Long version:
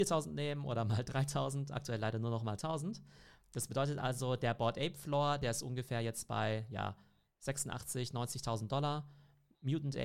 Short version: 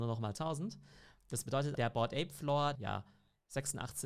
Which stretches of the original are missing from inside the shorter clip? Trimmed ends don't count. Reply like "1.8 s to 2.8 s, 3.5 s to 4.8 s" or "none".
4.0 s to 4.4 s, 5.4 s to 6.7 s